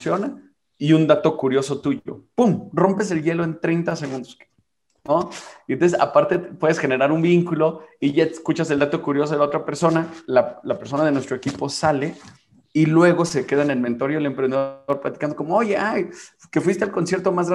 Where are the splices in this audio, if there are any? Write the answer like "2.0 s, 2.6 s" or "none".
none